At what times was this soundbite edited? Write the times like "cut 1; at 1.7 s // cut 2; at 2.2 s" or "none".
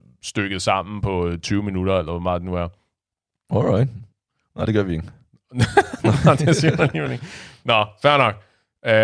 none